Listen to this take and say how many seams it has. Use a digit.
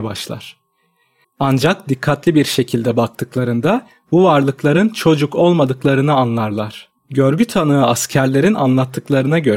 2